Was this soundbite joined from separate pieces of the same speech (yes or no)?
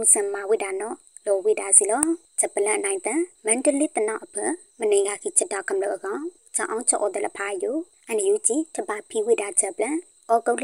no